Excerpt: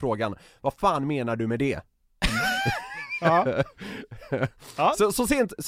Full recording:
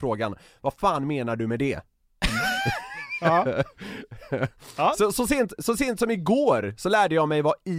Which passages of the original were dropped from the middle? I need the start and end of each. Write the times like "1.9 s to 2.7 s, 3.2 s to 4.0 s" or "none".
none